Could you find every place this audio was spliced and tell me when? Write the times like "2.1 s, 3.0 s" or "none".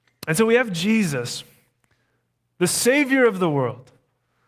none